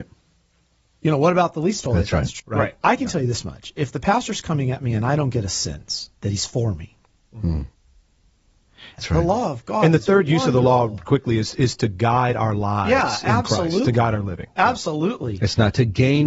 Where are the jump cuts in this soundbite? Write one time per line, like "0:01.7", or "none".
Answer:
0:02.4
0:09.0